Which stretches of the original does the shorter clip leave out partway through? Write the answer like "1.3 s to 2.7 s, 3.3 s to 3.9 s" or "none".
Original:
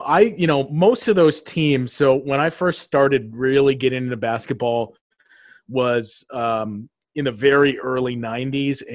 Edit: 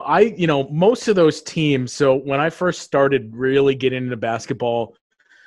none